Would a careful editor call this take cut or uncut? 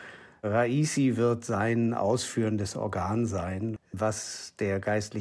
cut